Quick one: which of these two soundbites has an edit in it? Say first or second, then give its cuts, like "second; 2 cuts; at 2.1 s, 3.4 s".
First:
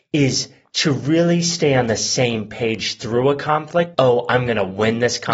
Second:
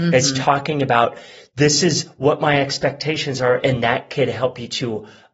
first; 1 cut; at 3.9 s